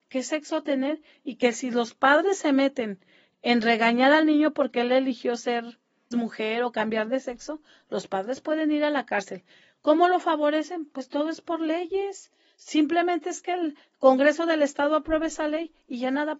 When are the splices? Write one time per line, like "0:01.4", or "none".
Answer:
0:06.1

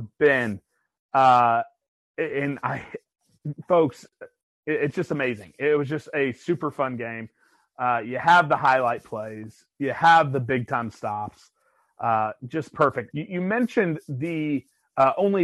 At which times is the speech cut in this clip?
0:13.1

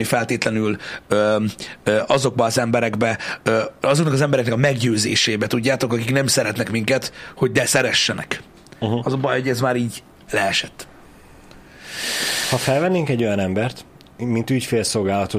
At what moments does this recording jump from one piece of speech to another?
0:10.3
0:14.2

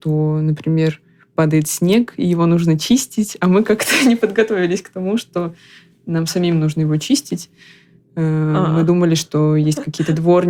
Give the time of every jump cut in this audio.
none

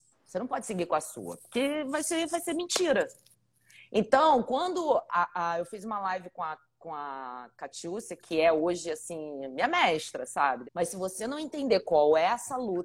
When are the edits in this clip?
0:10.6

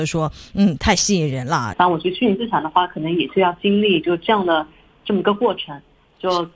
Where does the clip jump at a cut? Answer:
0:01.7

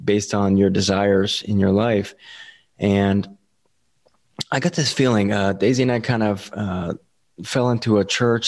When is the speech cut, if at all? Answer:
none

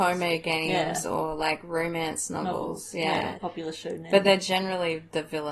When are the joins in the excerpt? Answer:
0:03.4

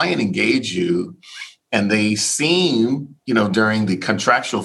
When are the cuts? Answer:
0:03.2

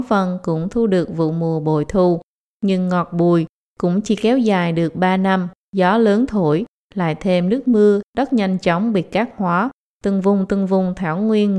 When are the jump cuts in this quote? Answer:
0:05.6
0:08.0

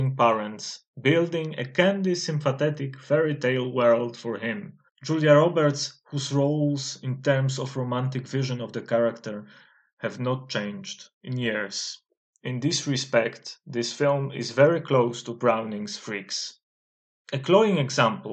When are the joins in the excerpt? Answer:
0:04.9
0:12.3

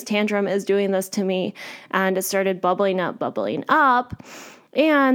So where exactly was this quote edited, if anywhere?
0:03.2

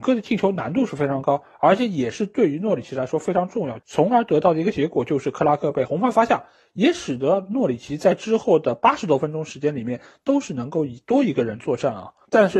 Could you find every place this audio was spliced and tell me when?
0:03.8

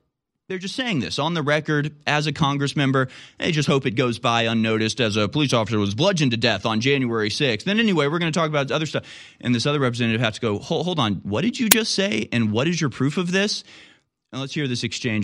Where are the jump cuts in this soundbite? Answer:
none

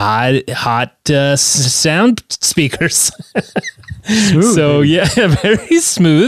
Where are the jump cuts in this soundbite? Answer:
none

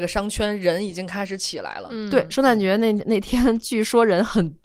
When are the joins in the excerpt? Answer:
none

